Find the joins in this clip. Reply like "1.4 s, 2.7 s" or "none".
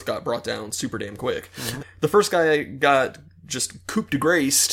1.8 s